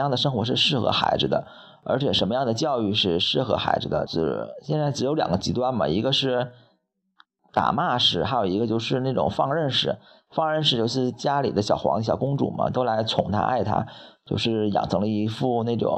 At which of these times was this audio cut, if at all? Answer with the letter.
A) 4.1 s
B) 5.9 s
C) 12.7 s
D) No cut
A